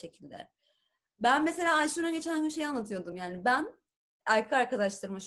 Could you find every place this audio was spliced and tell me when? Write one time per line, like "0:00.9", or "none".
none